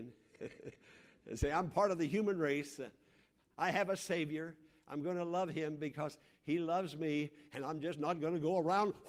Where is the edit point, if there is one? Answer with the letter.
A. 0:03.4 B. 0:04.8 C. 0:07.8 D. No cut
D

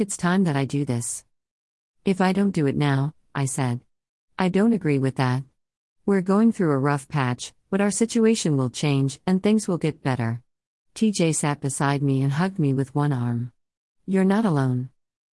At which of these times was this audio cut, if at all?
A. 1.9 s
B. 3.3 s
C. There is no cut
B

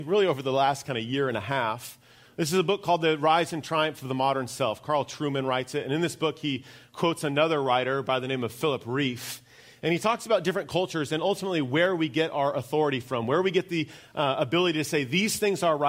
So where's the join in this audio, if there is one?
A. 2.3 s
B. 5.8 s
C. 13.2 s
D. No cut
C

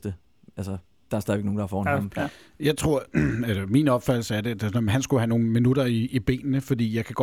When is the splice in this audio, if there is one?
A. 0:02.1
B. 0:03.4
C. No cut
A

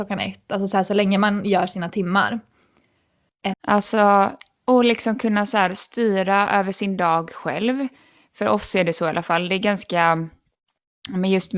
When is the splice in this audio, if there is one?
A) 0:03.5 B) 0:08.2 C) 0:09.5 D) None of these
A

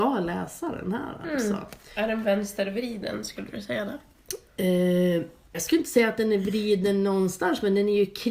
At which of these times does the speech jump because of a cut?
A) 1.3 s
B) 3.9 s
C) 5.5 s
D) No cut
C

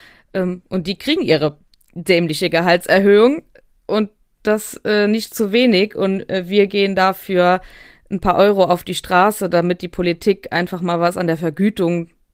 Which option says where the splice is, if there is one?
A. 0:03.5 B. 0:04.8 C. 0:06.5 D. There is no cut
D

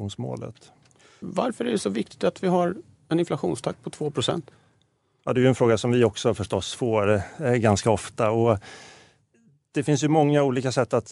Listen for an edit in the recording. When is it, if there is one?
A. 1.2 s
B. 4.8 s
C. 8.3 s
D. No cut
A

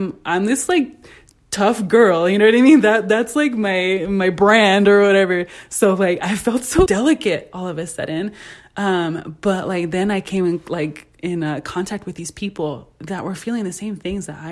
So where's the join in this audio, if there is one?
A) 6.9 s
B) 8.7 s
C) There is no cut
A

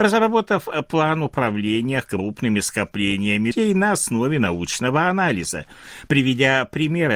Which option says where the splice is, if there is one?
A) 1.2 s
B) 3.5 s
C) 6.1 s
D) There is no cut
B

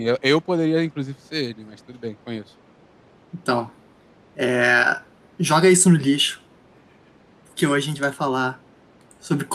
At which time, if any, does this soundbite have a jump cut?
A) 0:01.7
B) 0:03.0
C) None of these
C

